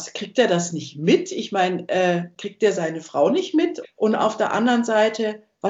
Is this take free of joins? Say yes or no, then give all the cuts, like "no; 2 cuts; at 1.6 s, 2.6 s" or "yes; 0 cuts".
no; 1 cut; at 3.8 s